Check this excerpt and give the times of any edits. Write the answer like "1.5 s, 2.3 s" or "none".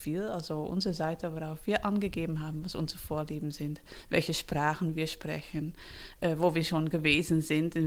none